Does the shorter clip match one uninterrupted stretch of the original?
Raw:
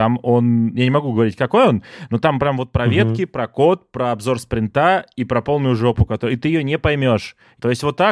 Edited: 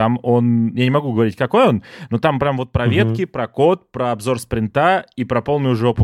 yes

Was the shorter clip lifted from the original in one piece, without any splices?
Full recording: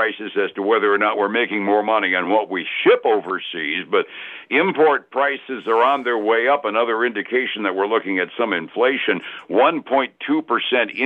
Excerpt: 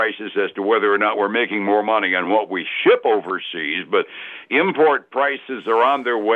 yes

